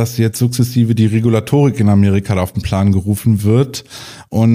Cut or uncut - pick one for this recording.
uncut